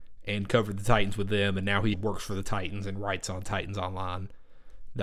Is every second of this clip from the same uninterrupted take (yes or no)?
no